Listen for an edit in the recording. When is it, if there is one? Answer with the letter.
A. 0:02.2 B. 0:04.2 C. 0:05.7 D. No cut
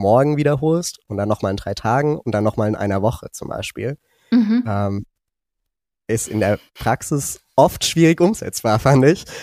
D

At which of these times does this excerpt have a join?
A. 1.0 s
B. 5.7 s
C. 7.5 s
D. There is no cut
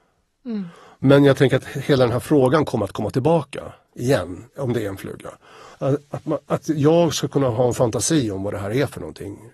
B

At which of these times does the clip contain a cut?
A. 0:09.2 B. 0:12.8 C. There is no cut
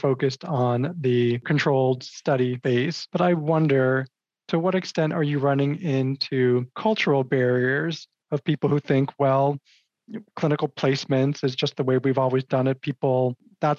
C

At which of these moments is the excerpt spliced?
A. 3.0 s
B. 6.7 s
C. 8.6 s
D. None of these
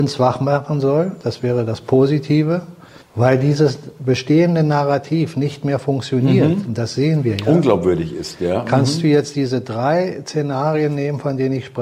A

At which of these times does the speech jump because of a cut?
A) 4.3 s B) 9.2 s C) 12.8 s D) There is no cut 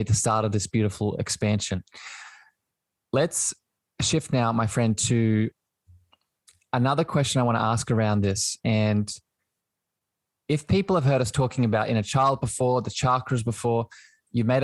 D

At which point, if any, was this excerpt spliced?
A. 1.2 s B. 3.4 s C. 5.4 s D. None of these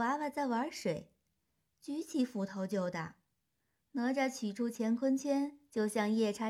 D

